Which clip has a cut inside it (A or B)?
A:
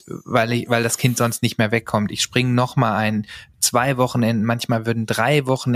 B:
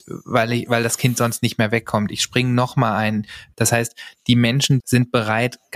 B